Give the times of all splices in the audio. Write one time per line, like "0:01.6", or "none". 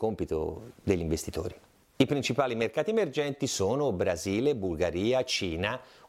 none